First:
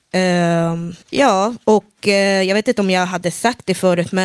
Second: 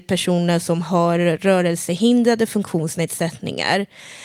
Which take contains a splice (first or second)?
first